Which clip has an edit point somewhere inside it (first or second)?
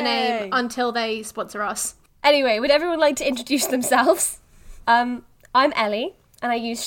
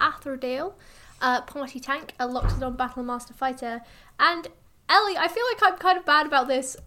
first